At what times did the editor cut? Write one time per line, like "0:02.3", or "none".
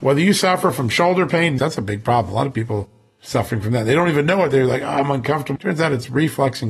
0:01.6
0:05.6